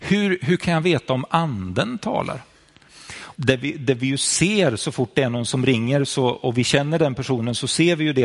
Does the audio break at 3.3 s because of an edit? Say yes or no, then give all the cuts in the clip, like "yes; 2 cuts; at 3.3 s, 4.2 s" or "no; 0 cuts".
yes; 1 cut; at 3.3 s